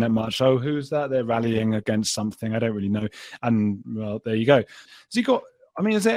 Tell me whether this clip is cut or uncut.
cut